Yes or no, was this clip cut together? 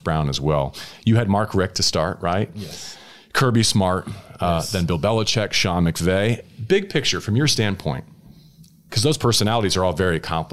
no